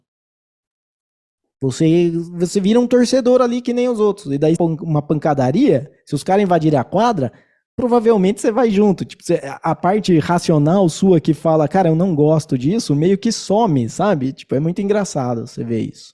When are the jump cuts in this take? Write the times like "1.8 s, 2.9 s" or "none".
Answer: 1.5 s, 4.6 s